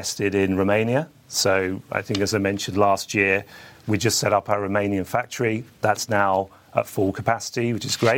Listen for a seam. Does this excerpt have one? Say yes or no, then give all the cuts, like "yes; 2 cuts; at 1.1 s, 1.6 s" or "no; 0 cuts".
no; 0 cuts